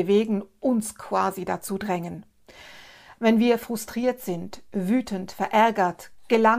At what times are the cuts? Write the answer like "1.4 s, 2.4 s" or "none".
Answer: none

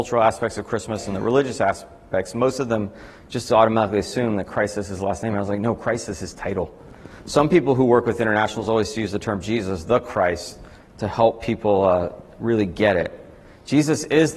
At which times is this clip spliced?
none

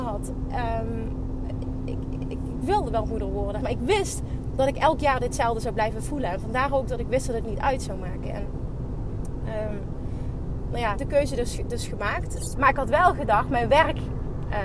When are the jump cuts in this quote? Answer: 3.6 s, 10.9 s, 12.5 s

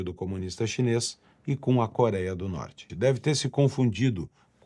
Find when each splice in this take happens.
2.9 s

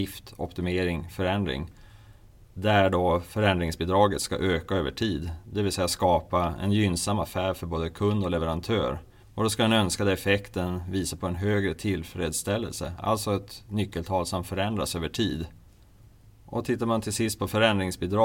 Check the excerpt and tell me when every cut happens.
9.2 s

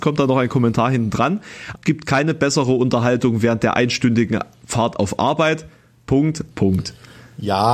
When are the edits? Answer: 1.8 s, 6.5 s

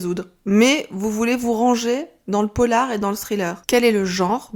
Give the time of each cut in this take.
3.7 s

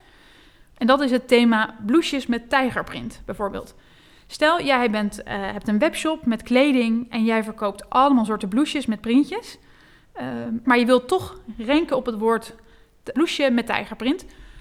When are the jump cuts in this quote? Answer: 10.6 s, 13.1 s

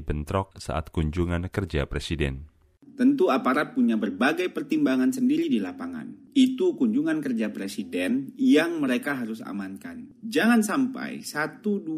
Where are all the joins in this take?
none

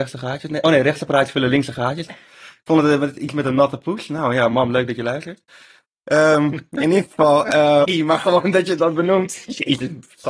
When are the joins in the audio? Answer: 2.1 s, 7.8 s

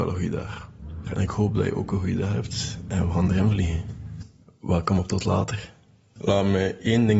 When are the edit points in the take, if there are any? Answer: 1.1 s

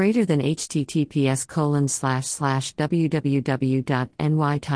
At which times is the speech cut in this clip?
none

